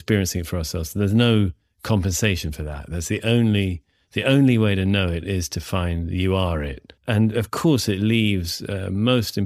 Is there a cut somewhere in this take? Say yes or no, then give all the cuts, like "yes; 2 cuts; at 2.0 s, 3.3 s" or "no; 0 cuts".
yes; 1 cut; at 7.0 s